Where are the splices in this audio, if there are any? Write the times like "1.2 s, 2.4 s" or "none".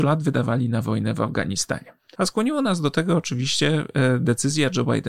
2.2 s